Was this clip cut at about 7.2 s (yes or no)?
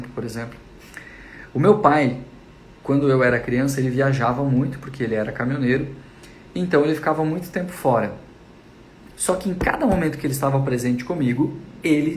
no